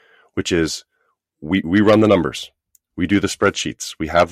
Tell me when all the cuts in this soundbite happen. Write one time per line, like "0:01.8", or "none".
none